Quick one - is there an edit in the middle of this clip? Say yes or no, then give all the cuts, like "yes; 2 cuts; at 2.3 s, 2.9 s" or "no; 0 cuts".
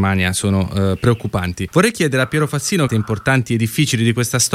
yes; 2 cuts; at 1.7 s, 2.9 s